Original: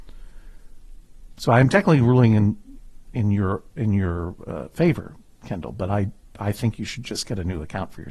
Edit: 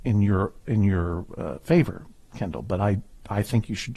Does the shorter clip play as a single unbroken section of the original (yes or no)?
yes